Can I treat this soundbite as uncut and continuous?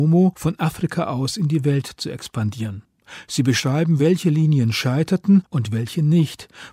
yes; 0 cuts

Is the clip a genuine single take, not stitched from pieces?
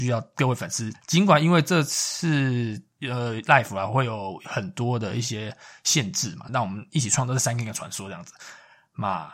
no; 1 cut; at 6.5 s

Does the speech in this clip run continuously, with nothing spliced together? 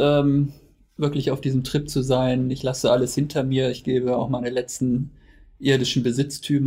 yes; 0 cuts

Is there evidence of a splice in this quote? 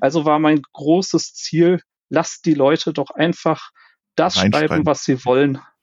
no; 0 cuts

